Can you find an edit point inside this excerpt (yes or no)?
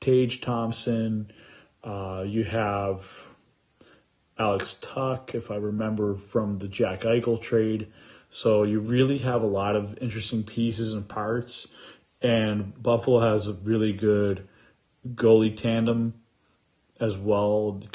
no